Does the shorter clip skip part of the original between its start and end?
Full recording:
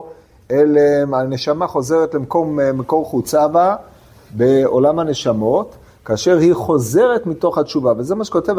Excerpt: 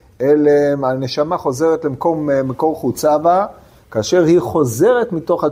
yes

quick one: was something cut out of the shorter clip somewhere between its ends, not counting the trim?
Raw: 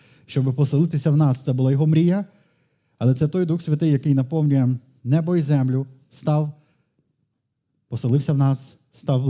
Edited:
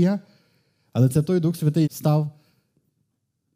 yes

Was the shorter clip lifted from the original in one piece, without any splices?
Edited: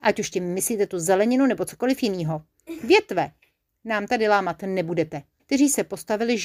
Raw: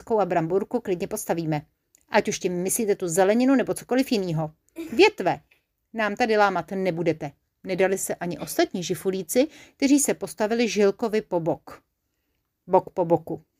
no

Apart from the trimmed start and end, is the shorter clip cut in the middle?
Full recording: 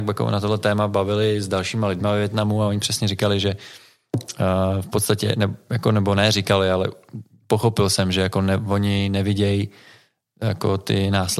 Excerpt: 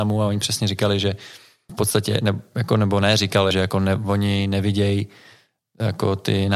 yes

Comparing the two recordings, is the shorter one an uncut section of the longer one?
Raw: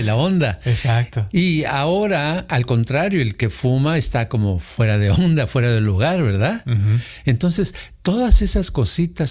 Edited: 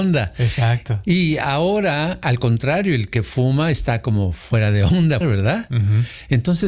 no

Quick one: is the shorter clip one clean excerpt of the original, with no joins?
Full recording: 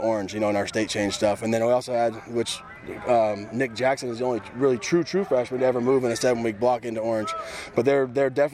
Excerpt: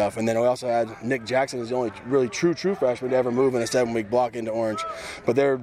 no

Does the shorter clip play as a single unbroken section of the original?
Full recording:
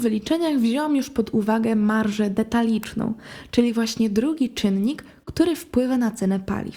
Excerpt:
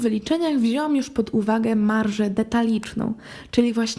yes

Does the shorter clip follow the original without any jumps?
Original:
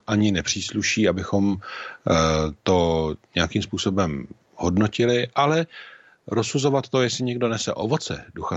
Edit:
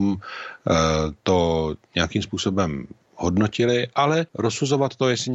no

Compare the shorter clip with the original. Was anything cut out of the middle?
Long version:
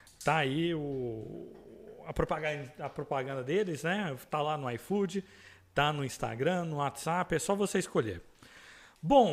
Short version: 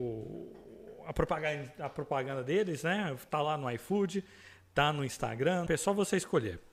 yes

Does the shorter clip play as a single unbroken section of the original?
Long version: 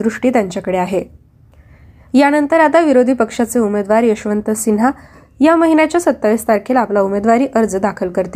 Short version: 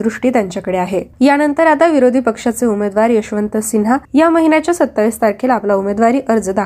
no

